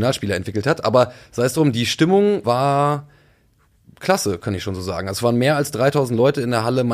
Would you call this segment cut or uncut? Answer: cut